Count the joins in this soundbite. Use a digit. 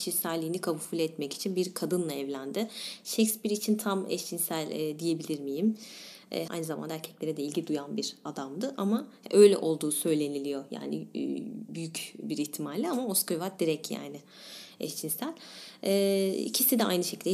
1